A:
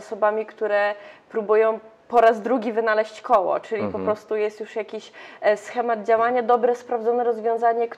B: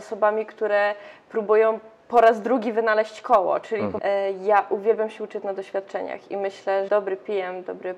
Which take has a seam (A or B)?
B